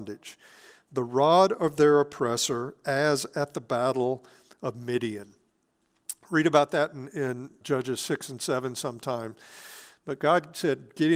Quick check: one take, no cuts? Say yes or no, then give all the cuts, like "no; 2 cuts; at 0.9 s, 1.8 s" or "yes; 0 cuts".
no; 2 cuts; at 7.6 s, 9.9 s